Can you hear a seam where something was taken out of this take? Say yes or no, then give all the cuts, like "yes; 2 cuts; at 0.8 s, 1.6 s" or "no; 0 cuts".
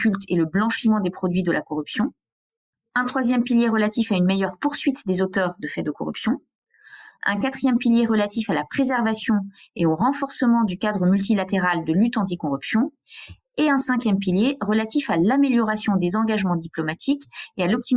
no; 0 cuts